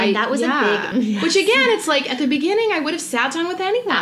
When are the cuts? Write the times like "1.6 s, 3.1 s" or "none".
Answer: 0.9 s